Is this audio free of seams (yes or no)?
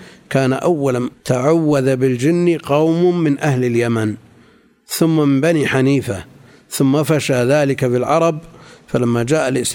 no